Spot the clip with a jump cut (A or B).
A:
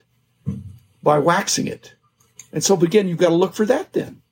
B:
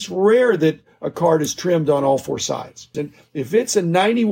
B